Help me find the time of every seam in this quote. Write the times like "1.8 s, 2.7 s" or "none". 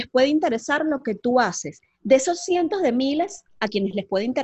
3.5 s